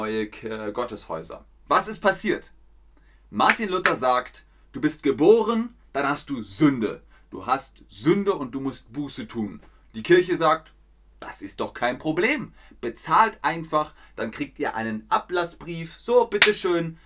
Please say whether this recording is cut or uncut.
uncut